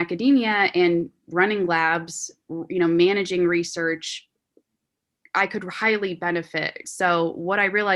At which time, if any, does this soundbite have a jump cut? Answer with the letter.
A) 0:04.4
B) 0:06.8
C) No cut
B